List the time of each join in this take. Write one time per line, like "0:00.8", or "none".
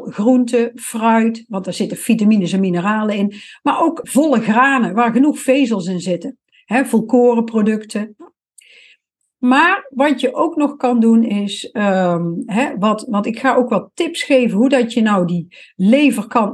0:04.0